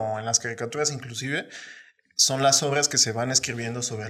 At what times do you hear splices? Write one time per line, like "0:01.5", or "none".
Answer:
none